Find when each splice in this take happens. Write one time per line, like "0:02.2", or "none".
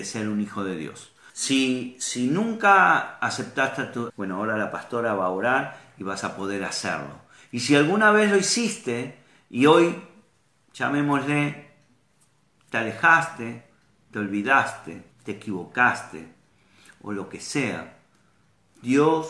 0:01.3
0:04.1
0:15.1